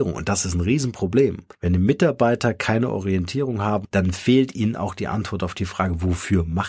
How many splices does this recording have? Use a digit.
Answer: 2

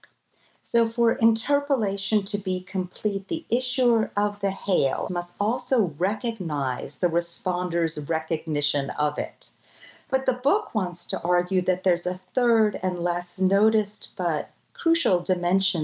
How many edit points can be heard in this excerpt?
2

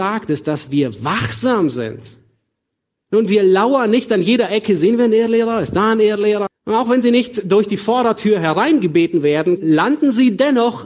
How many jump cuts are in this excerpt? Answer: 2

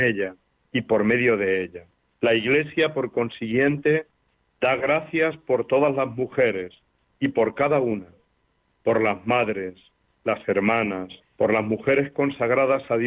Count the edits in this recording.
2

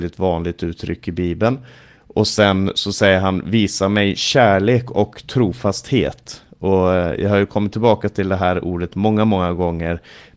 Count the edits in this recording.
0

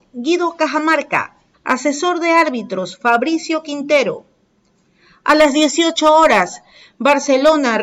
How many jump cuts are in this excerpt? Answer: 1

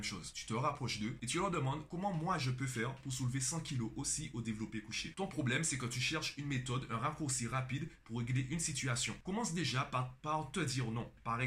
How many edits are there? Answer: 2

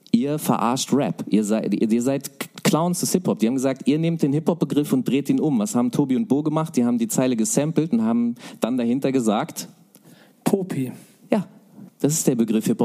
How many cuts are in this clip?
1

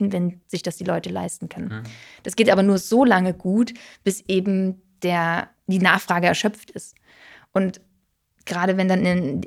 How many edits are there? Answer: 0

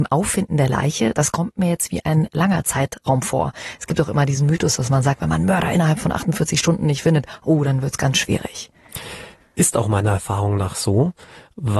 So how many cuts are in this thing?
0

